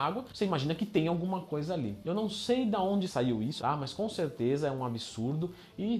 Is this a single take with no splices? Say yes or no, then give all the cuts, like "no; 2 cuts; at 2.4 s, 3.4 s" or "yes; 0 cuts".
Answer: no; 2 cuts; at 2.0 s, 3.6 s